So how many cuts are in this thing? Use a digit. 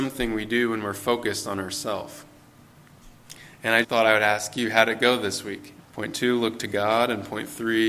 2